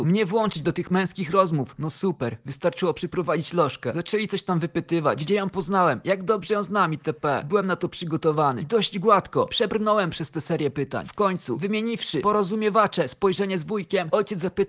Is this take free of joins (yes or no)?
yes